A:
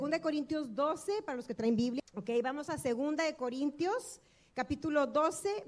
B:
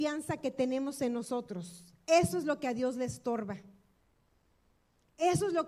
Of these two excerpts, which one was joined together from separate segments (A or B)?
A